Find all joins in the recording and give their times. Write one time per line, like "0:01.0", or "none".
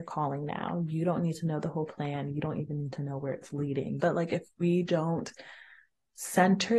0:04.0